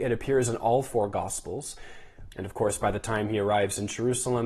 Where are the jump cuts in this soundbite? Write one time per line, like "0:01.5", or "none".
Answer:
0:02.3